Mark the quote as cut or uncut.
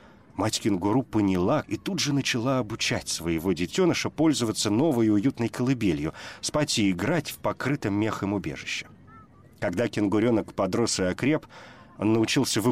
cut